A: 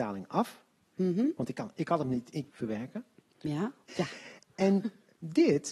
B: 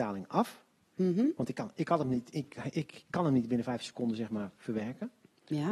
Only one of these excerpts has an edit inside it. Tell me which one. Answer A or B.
A